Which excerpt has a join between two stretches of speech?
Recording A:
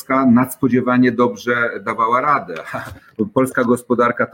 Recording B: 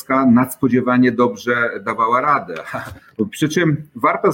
B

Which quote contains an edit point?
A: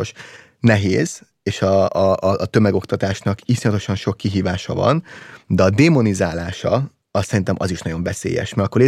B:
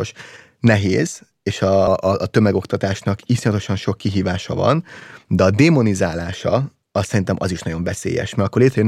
B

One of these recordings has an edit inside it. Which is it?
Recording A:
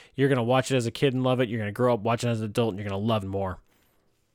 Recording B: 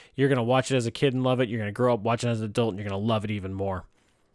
A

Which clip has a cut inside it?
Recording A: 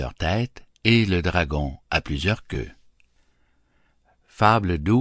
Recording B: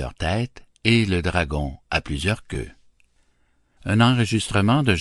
B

